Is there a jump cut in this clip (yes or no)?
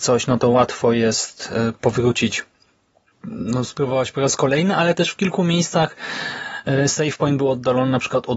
no